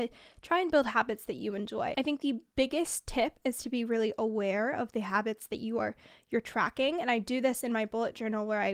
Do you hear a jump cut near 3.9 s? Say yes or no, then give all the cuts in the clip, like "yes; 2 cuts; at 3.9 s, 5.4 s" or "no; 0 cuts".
no; 1 cut; at 1.9 s